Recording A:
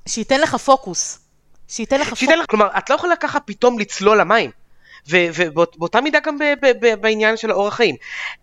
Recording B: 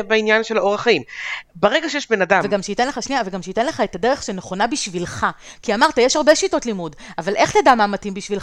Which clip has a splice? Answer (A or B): A